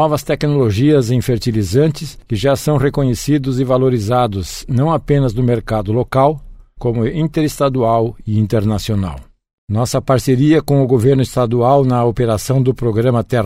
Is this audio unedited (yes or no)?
no